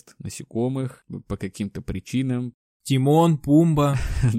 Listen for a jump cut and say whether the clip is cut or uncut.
uncut